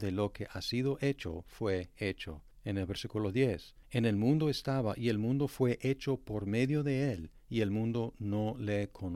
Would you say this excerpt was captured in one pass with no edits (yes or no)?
yes